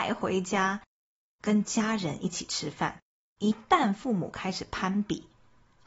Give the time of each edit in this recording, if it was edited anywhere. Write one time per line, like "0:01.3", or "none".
0:03.4